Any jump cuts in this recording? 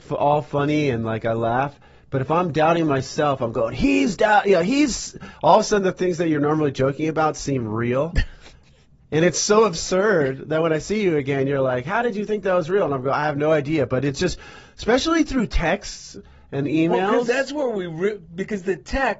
no; 0 cuts

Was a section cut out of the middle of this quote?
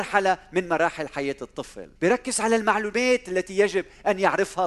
yes; 1 cut; at 2.0 s

